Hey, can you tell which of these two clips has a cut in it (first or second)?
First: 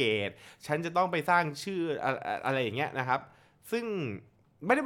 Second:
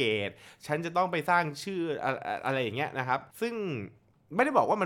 second